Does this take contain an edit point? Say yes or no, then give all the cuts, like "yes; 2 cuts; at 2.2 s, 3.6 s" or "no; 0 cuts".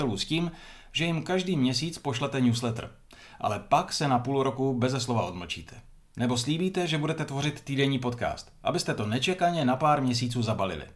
no; 0 cuts